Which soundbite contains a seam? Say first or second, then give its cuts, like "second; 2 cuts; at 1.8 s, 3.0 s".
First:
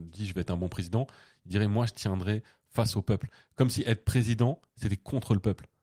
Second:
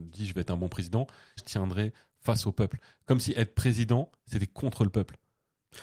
second; 1 cut; at 1.4 s